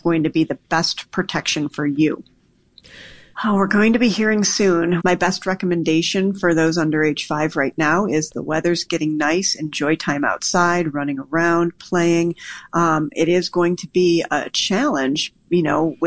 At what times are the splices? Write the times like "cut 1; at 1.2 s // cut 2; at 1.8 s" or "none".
cut 1; at 3.3 s // cut 2; at 5.0 s